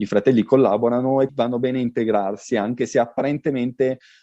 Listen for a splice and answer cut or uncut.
cut